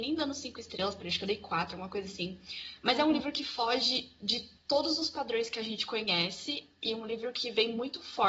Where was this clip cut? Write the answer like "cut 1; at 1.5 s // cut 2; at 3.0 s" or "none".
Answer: none